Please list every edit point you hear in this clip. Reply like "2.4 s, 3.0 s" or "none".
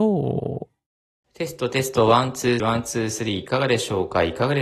2.6 s